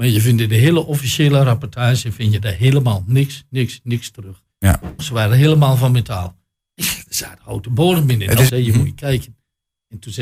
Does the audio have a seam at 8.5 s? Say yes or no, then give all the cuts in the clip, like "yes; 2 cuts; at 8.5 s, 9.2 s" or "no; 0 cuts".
yes; 2 cuts; at 5.0 s, 8.5 s